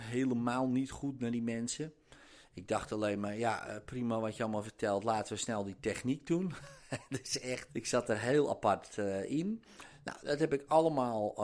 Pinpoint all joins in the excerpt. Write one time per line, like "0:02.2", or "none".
0:07.7